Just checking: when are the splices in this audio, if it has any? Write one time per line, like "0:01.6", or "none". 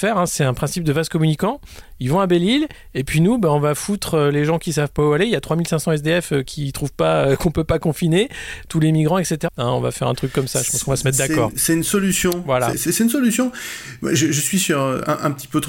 0:09.5